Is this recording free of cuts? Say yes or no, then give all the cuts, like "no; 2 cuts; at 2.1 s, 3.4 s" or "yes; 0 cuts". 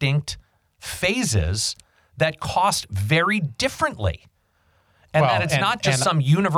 yes; 0 cuts